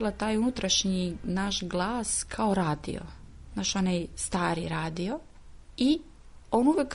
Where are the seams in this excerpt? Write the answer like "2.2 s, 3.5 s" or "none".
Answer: none